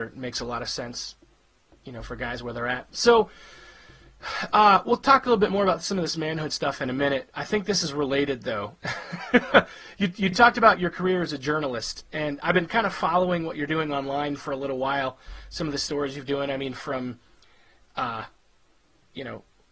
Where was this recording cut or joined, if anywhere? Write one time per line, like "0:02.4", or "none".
none